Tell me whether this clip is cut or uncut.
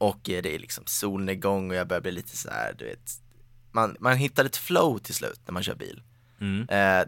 cut